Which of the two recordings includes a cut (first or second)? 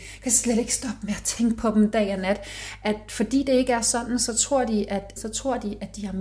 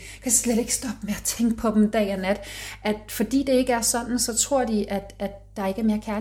first